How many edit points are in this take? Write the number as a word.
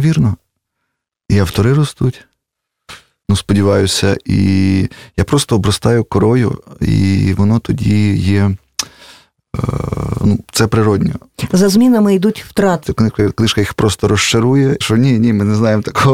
two